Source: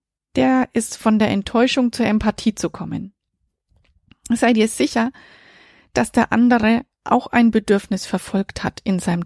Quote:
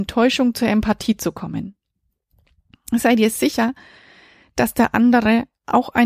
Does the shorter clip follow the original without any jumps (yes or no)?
yes